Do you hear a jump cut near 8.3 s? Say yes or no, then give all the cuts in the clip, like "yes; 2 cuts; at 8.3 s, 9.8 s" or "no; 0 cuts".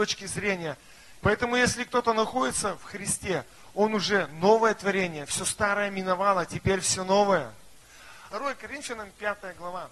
yes; 2 cuts; at 1.2 s, 8.3 s